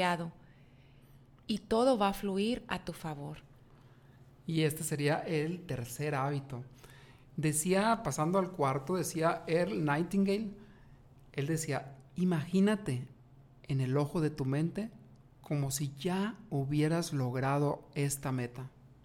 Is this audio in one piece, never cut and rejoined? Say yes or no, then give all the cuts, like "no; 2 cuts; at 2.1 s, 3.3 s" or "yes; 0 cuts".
yes; 0 cuts